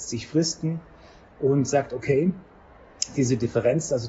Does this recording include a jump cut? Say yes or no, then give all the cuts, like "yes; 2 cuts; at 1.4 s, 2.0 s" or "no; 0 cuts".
no; 0 cuts